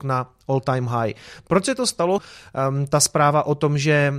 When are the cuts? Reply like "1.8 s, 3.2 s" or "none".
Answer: 2.2 s